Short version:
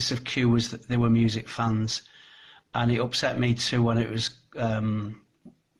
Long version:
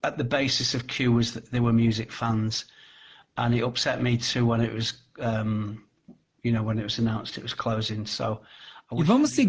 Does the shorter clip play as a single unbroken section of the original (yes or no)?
yes